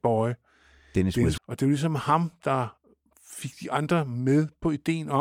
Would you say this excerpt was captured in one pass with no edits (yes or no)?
no